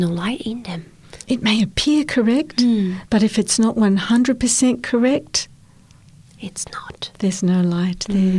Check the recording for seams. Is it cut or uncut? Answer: uncut